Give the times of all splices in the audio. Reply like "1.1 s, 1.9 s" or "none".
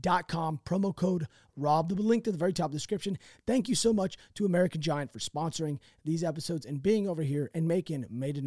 none